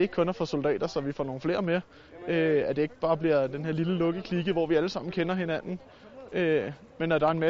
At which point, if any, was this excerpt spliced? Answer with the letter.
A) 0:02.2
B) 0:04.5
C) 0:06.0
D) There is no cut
D